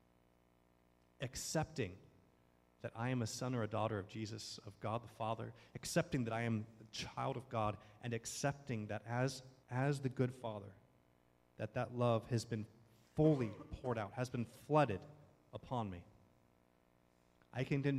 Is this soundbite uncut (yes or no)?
no